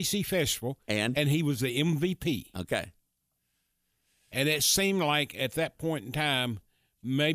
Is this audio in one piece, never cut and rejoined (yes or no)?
yes